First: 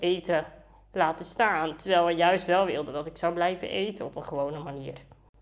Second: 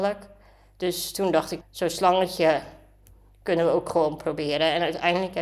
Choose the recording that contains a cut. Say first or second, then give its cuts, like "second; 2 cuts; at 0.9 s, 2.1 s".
second; 1 cut; at 1.6 s